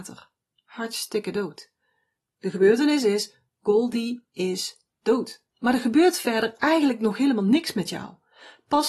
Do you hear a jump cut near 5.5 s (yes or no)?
yes